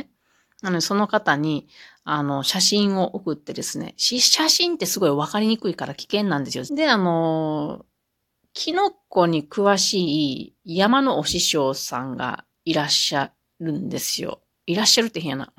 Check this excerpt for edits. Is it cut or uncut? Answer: cut